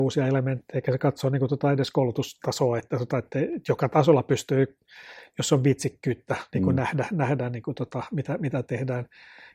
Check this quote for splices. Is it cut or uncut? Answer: uncut